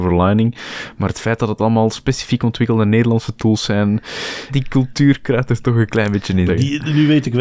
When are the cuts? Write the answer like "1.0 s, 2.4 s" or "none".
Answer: 4.5 s, 6.5 s